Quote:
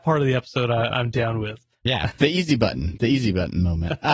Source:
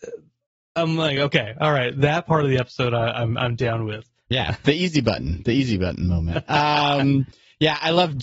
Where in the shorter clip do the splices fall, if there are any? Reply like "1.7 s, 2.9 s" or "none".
0.9 s